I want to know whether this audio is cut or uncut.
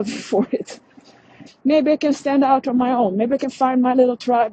cut